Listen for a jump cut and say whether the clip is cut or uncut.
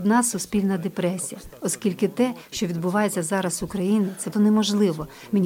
cut